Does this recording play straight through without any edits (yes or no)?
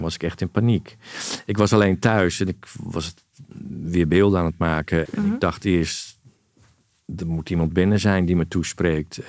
no